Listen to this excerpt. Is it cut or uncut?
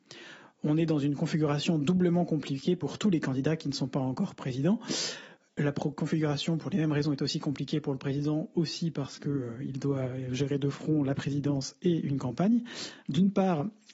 uncut